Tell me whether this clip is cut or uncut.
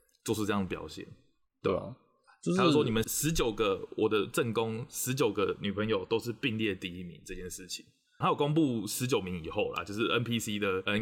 cut